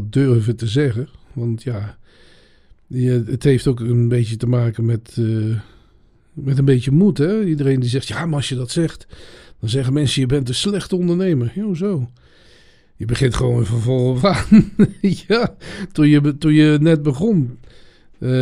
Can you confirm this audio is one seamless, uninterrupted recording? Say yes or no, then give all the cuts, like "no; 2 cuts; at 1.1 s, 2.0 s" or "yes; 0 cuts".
yes; 0 cuts